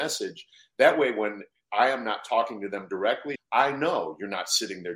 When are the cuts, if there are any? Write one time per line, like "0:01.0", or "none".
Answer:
0:03.4

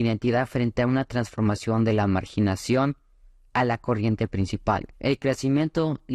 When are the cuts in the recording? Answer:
0:04.9

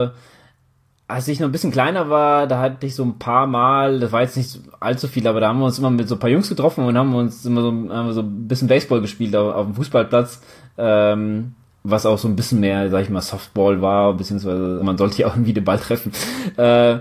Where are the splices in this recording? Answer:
0:14.8

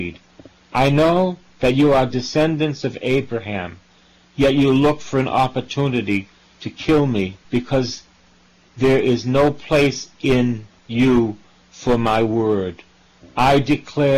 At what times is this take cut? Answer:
0:07.4

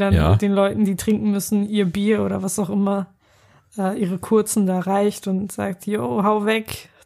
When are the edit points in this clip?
none

